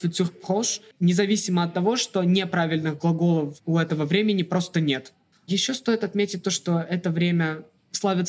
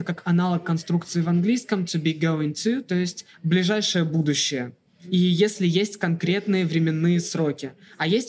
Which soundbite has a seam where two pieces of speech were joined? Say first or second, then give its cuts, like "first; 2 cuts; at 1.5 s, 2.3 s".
first; 2 cuts; at 0.9 s, 5.3 s